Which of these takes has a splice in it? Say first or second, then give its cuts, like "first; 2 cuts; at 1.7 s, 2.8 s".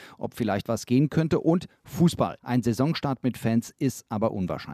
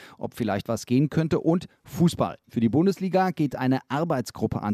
first; 1 cut; at 2.4 s